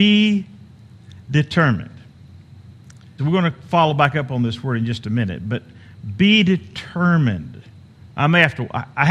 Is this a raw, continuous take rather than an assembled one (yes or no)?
no